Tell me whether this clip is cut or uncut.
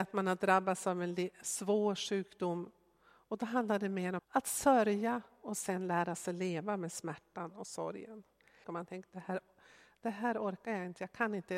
cut